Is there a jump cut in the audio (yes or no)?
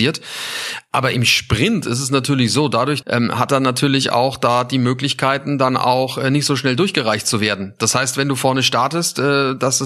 yes